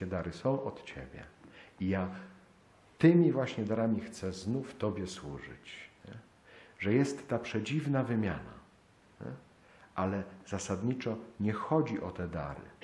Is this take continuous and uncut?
yes; 0 cuts

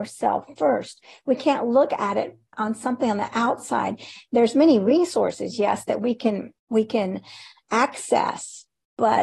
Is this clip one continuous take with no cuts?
no; 2 cuts; at 2.5 s, 6.6 s

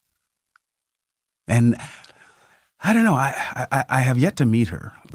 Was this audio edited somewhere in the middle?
no; 0 cuts

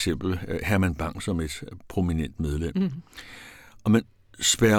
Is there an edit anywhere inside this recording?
no; 0 cuts

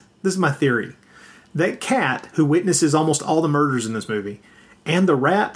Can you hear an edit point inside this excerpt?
no; 0 cuts

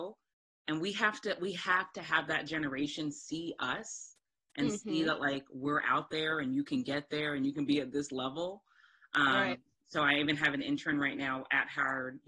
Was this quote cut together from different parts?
no; 0 cuts

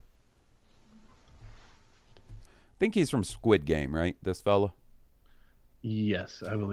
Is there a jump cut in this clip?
yes; 1 cut; at 2.4 s

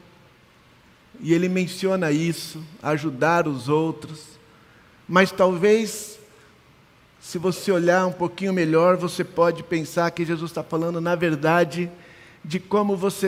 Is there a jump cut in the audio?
no; 0 cuts

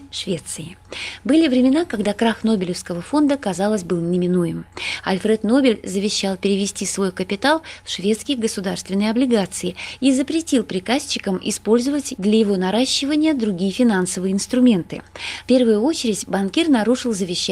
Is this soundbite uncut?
no; 1 cut; at 15.4 s

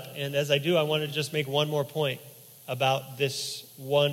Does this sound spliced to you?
no; 0 cuts

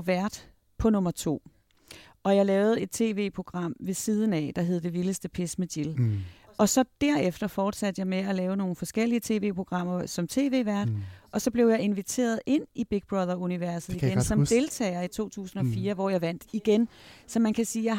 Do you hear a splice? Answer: no; 0 cuts

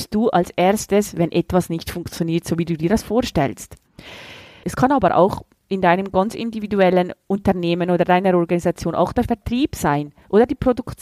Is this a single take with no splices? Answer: no; 1 cut; at 4.6 s

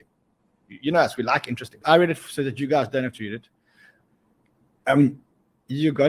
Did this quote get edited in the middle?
yes; 1 cut; at 1.8 s

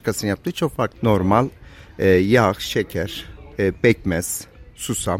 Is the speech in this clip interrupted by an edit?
yes; 2 cuts; at 0.9 s, 3.5 s

